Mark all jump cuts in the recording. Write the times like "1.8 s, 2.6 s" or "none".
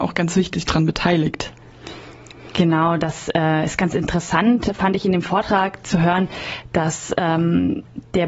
none